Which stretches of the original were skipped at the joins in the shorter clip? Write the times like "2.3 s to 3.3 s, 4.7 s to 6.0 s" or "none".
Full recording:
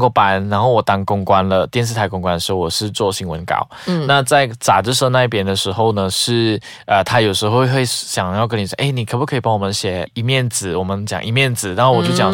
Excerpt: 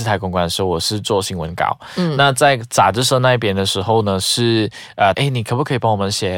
7.0 s to 8.8 s